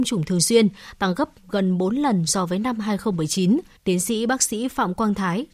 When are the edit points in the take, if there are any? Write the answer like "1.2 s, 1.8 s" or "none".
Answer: 3.8 s

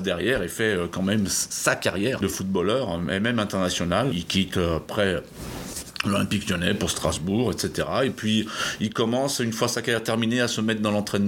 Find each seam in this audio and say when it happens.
none

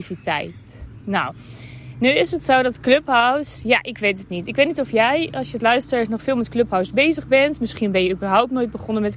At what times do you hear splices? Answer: none

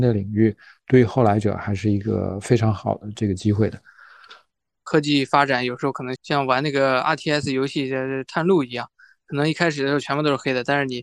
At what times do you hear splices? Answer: 6.2 s

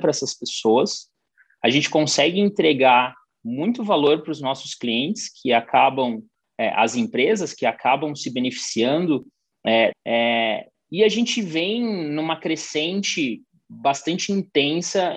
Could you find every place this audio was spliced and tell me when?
9.9 s

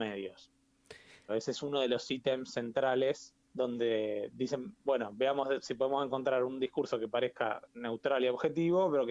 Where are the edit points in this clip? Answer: 1.3 s, 3.4 s

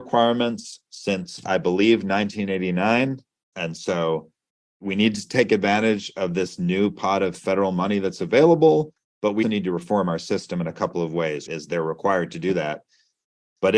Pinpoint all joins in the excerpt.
3.5 s, 9.4 s, 11.5 s

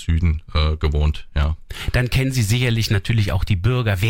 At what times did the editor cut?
none

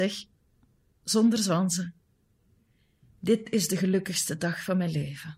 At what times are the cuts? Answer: 0.9 s

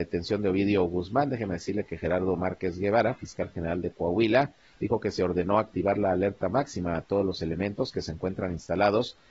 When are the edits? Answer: none

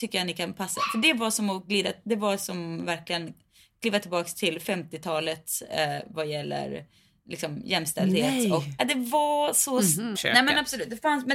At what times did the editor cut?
8.8 s, 10.1 s

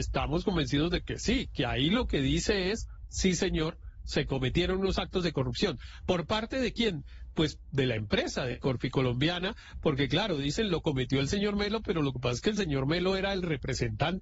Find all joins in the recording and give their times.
none

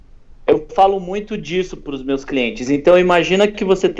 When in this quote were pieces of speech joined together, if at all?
none

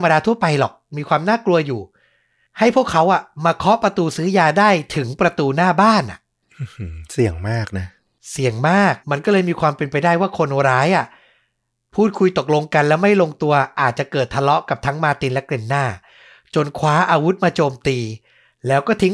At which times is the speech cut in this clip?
9.0 s

